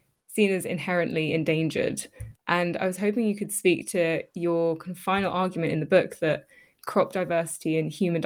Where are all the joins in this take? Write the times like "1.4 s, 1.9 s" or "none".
2.3 s

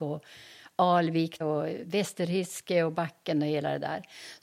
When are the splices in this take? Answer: 1.4 s

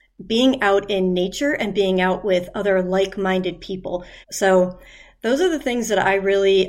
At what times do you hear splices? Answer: 4.2 s

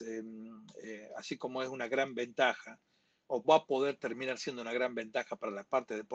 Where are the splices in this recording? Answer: 3.4 s

